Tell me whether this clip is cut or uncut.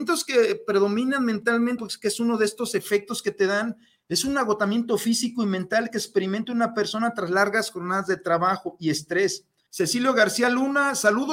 cut